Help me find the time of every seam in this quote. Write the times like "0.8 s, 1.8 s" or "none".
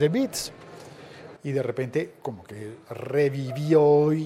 1.4 s